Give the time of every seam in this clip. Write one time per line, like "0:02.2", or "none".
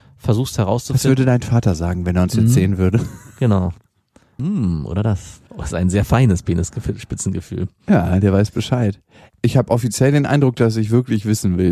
0:04.4
0:05.5